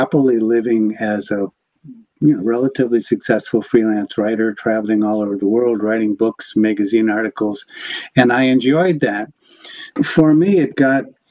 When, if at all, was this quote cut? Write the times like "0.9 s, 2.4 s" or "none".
10.0 s